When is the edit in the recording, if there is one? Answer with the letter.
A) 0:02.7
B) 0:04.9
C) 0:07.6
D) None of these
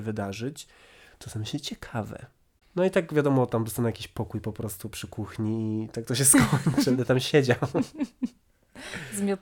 B